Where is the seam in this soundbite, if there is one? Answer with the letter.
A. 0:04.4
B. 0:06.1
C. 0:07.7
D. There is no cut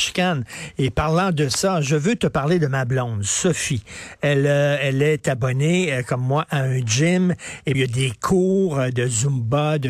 C